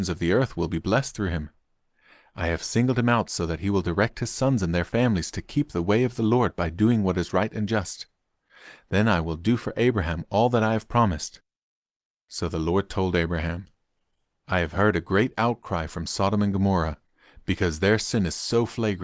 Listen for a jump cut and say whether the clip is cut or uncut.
uncut